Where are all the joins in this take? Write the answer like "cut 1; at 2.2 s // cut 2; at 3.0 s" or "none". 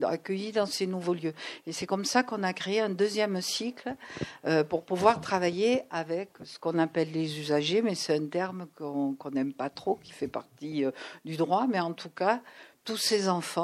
none

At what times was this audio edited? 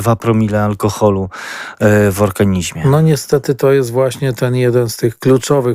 none

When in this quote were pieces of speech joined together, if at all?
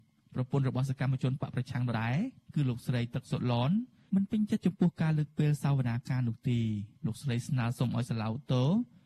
cut 1; at 1.9 s // cut 2; at 6.9 s

